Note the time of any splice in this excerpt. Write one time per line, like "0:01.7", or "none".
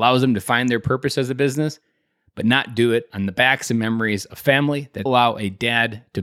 0:05.1